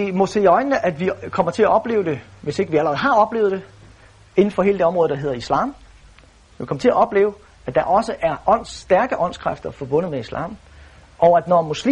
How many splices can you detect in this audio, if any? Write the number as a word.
zero